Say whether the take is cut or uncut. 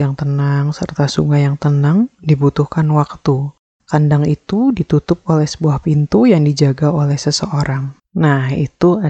cut